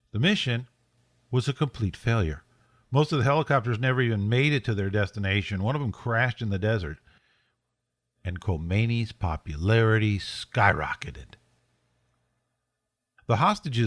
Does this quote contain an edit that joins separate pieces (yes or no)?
no